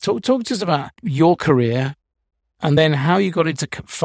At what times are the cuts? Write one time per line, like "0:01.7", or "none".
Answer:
none